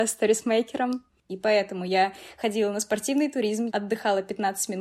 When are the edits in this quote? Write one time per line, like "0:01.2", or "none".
0:01.3
0:03.7